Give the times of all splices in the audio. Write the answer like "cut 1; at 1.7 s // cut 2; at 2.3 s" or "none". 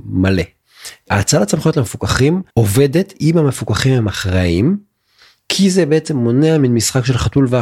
cut 1; at 2.5 s